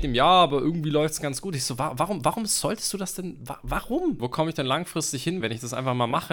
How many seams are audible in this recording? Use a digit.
2